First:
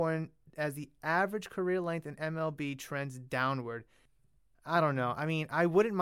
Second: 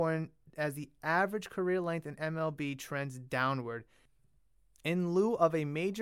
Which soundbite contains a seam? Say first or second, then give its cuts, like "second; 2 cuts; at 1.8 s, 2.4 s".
first; 1 cut; at 4.5 s